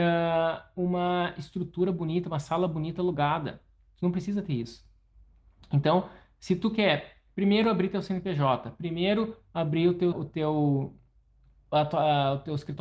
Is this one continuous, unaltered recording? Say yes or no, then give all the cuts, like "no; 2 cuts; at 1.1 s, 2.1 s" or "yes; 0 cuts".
no; 1 cut; at 10.1 s